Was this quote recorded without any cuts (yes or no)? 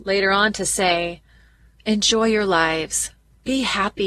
no